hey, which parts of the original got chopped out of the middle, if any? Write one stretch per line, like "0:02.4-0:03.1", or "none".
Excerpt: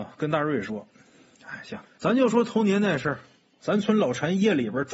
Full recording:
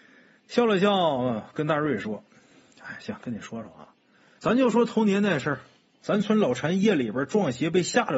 0:03.2-0:04.3

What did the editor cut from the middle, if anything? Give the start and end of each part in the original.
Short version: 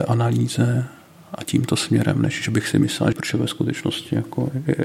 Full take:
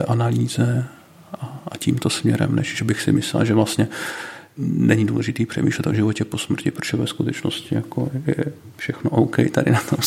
0:01.4-0:01.7
0:03.5-0:06.7

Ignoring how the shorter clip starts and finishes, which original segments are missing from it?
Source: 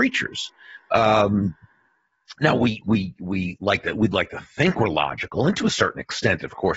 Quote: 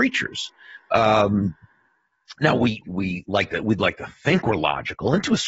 0:02.8-0:03.2

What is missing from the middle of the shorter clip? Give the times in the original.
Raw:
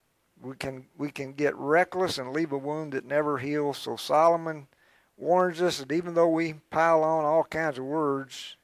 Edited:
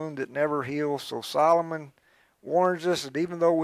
none

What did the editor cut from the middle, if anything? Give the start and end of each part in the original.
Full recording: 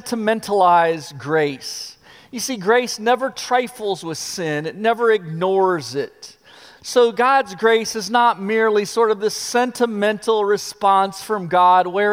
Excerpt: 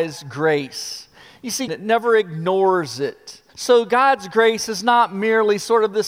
0:02.6-0:04.6
0:06.4-0:06.8

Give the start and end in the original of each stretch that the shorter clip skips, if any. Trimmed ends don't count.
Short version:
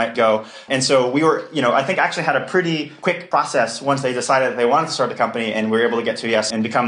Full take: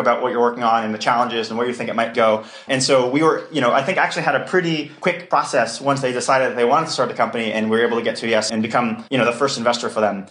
none

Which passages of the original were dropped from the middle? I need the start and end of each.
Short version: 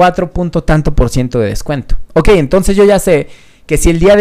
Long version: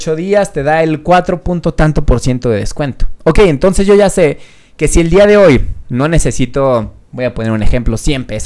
none

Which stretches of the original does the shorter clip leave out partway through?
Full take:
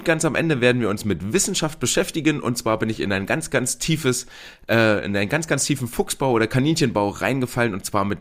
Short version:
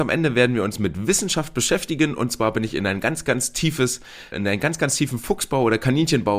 0:04.6-0:05.0

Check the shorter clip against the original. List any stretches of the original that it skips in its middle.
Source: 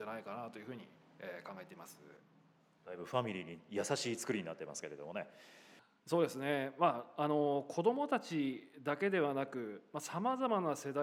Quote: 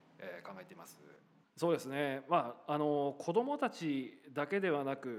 0:02.4-0:05.9

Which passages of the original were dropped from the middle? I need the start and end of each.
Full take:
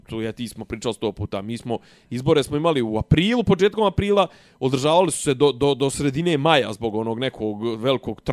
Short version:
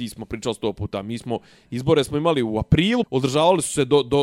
0:03.4-0:04.5

